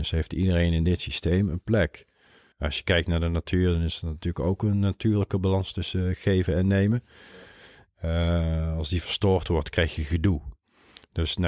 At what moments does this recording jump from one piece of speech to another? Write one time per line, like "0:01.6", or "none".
0:02.5